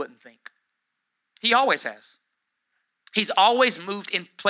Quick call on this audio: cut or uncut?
uncut